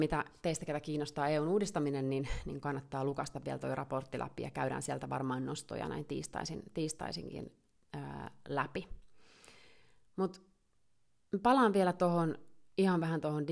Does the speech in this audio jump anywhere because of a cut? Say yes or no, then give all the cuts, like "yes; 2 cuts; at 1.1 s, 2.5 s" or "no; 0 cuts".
no; 0 cuts